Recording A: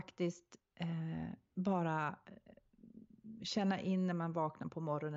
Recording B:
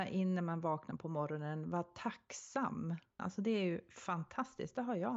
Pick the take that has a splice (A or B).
B